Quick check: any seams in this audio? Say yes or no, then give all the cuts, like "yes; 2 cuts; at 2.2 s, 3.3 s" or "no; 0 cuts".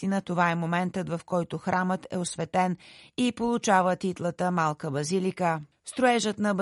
yes; 1 cut; at 5.7 s